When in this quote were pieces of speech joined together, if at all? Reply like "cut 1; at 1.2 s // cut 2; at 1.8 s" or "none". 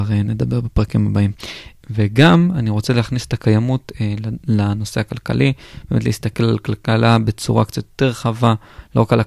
cut 1; at 1.8 s